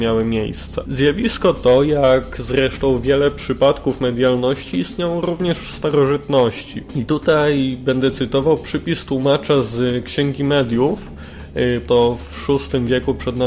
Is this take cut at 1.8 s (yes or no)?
no